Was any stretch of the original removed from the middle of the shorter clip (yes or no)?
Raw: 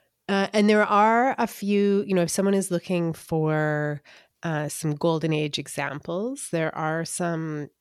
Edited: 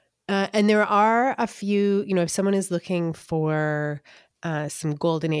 no